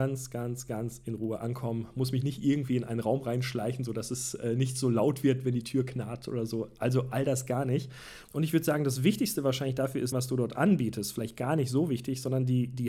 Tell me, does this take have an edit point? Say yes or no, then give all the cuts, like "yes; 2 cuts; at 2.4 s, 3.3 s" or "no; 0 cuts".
yes; 2 cuts; at 8.2 s, 10.1 s